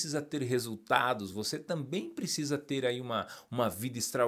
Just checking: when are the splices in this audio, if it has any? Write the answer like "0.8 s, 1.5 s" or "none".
none